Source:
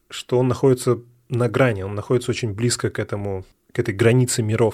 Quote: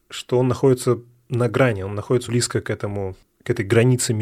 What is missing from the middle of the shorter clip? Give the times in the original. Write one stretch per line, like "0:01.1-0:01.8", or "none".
0:02.3-0:02.5